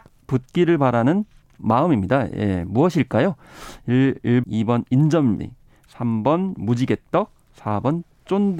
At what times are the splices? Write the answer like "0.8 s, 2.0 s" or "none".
4.4 s